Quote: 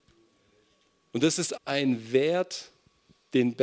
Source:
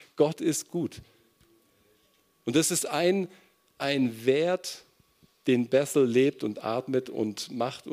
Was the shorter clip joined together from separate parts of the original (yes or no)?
yes